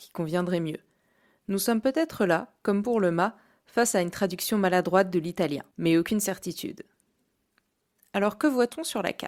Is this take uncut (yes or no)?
yes